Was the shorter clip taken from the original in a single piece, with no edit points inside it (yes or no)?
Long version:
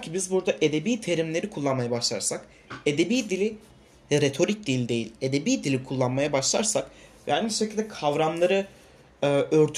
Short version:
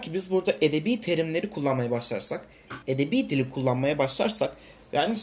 no